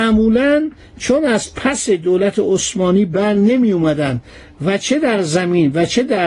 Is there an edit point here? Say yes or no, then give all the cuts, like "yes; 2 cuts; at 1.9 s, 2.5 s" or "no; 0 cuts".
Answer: no; 0 cuts